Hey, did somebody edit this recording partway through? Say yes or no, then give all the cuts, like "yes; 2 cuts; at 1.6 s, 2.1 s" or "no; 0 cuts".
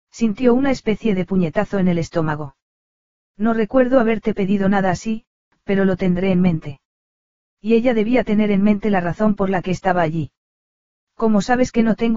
no; 0 cuts